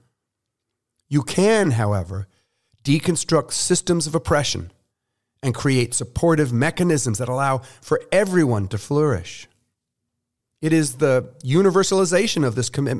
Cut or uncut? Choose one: uncut